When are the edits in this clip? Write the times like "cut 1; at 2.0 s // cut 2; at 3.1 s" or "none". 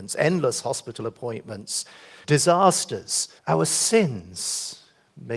cut 1; at 2.2 s // cut 2; at 3.4 s